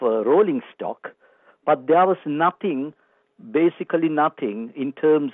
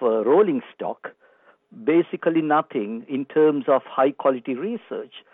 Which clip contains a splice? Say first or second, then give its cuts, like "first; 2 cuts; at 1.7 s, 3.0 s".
second; 1 cut; at 1.6 s